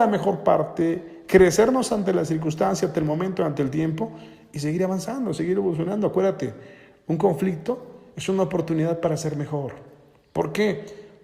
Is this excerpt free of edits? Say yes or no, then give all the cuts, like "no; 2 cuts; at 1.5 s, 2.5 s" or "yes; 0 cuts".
yes; 0 cuts